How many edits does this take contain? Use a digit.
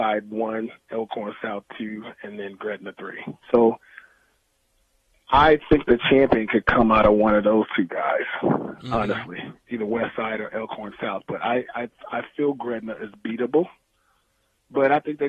1